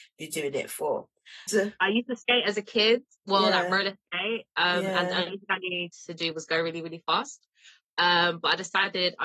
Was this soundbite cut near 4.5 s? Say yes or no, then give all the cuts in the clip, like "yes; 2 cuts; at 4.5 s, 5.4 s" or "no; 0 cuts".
no; 1 cut; at 1.5 s